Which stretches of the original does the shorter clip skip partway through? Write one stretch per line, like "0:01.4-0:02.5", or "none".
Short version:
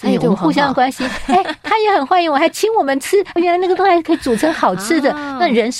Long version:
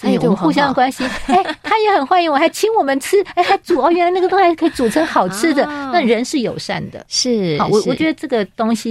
0:03.4-0:03.9